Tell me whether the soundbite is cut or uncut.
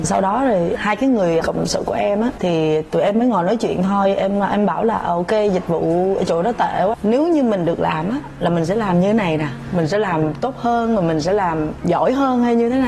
cut